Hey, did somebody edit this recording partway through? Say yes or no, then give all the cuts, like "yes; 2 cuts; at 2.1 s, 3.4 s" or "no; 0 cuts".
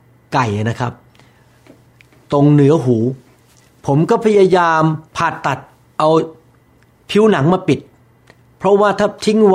yes; 1 cut; at 5.1 s